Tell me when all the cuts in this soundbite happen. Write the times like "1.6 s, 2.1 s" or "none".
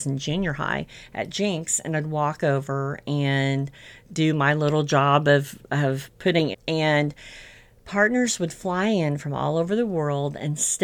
6.5 s